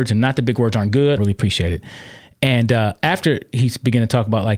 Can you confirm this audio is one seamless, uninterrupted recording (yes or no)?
no